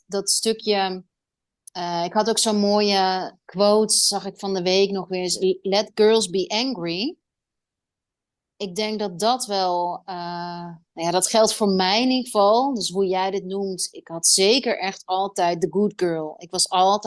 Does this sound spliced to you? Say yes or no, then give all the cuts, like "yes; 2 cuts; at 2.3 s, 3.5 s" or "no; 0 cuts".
no; 0 cuts